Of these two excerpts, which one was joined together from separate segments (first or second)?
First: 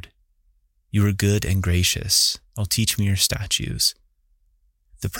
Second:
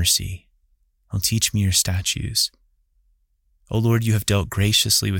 first